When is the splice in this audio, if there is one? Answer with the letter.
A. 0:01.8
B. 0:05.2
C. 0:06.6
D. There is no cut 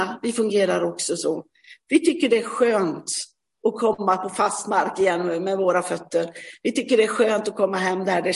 D